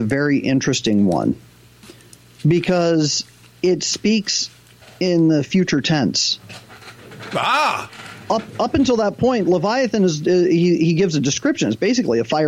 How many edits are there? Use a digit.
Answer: 0